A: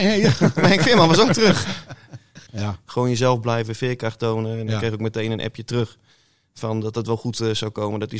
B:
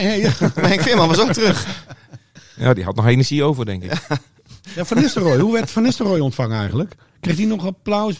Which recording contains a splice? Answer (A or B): A